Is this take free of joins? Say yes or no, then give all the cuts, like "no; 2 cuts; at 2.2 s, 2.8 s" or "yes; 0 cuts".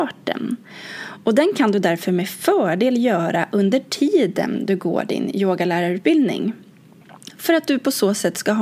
yes; 0 cuts